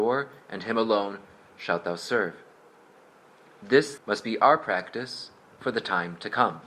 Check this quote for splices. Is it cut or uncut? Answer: cut